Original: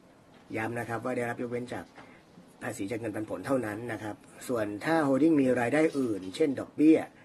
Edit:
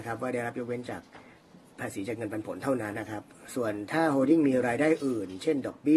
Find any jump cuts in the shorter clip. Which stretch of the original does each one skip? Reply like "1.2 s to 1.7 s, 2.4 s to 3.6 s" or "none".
3.8 s to 3.9 s